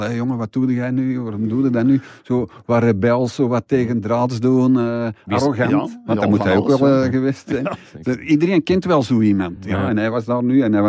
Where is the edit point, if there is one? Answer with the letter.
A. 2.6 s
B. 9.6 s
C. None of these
C